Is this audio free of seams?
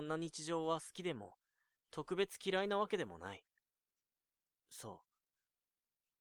yes; 0 cuts

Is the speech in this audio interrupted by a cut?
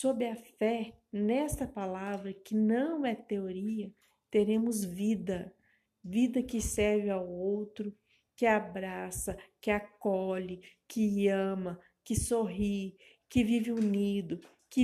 no; 0 cuts

